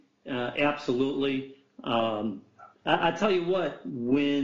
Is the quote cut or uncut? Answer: uncut